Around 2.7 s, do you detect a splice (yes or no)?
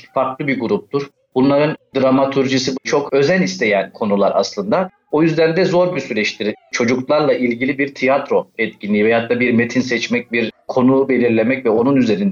yes